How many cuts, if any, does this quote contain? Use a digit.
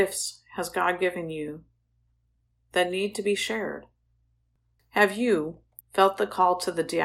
1